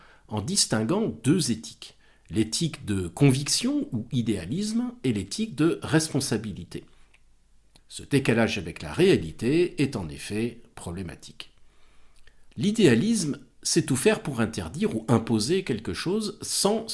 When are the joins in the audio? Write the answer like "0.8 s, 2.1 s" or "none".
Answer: 7.8 s, 12.5 s